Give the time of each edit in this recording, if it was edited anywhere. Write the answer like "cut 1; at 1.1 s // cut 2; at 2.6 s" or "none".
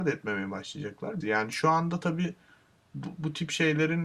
cut 1; at 1.2 s

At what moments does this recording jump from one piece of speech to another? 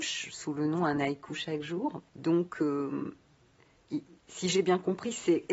cut 1; at 2.1 s

